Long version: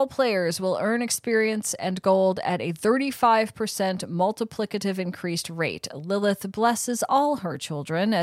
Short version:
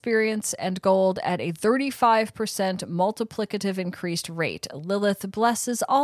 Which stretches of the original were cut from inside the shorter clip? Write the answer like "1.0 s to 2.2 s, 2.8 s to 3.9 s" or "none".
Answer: none